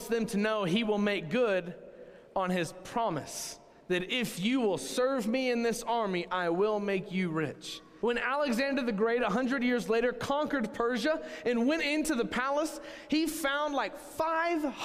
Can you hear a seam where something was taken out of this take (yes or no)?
yes